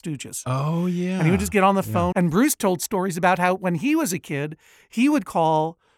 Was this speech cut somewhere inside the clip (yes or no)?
yes